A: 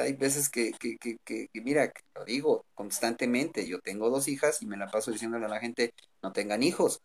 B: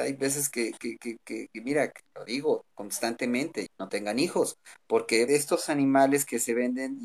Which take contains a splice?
B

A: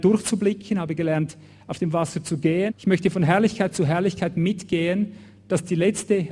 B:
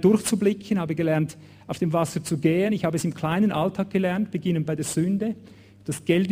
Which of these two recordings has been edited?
A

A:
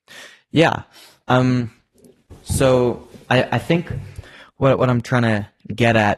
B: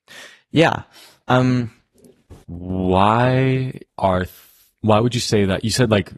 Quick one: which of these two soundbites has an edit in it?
B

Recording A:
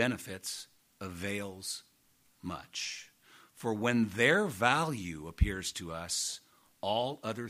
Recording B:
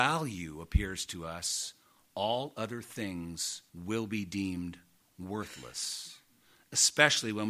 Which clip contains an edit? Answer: B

